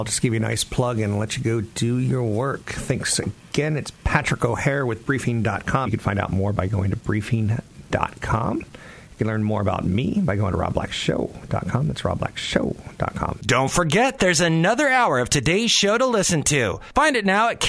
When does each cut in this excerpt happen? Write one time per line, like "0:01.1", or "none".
0:05.9